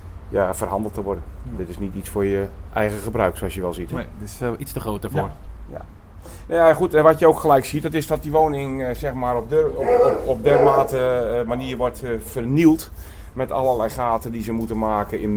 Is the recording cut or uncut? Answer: uncut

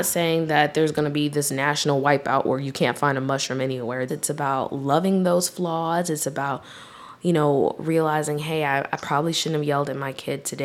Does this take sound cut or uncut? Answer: cut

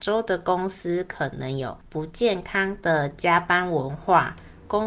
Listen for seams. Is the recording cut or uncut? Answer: uncut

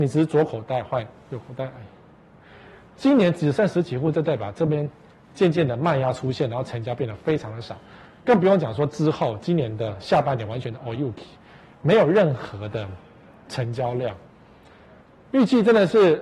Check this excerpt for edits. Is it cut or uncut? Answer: uncut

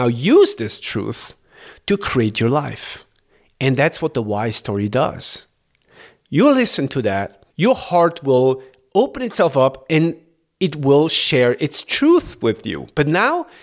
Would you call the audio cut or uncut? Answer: cut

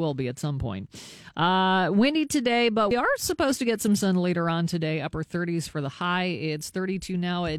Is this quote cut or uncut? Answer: uncut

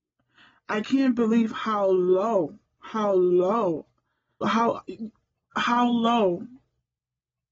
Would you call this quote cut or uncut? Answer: cut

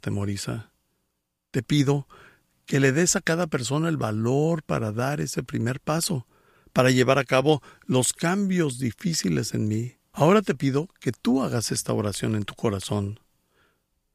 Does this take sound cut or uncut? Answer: cut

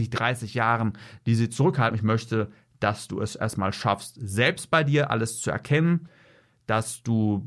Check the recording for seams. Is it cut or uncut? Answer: cut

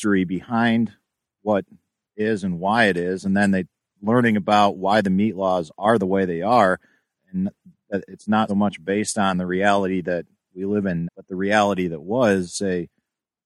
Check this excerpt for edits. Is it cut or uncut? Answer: cut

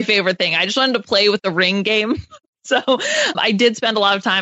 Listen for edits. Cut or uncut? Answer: cut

